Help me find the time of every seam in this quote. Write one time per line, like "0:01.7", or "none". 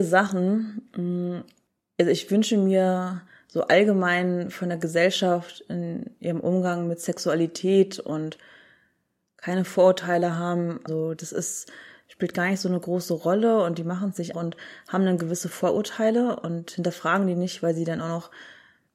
0:10.9
0:14.3